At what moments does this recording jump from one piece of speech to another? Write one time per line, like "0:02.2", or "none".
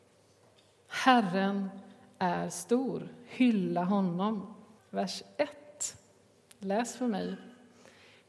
0:04.8